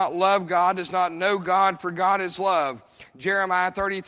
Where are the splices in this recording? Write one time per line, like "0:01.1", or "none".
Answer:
none